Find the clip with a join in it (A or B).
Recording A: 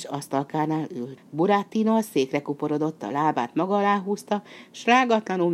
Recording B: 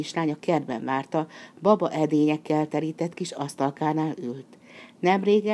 A